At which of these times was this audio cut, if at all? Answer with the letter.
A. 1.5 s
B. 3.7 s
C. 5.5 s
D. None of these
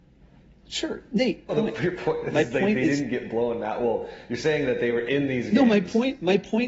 A